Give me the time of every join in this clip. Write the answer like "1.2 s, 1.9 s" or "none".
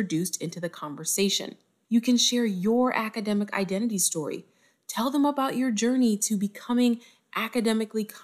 1.8 s

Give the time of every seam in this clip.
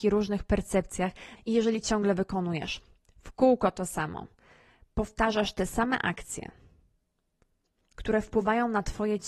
1.3 s

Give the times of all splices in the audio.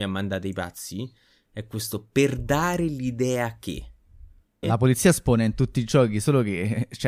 4.6 s

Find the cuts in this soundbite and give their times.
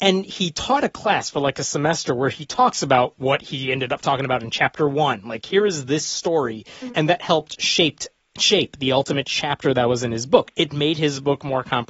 6.9 s, 10.5 s

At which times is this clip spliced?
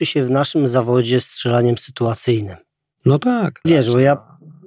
3.6 s

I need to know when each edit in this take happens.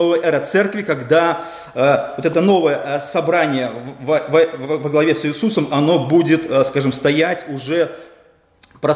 none

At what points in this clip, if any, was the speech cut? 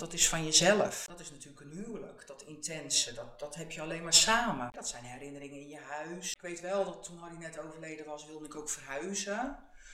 4.7 s

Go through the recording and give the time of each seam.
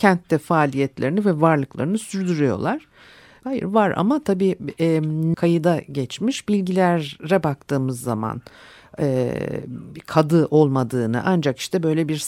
3.4 s, 5.3 s

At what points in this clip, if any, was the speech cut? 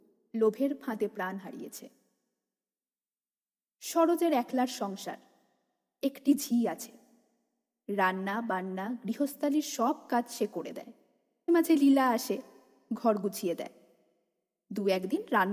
11.5 s

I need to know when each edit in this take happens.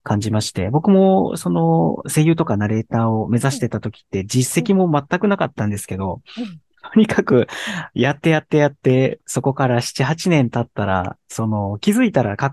none

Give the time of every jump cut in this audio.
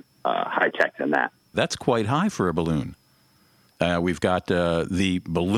1.5 s, 3.7 s

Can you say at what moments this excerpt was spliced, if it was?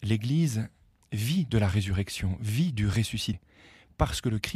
none

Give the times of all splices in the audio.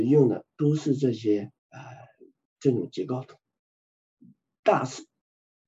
1.6 s

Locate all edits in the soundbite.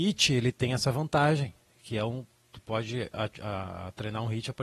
none

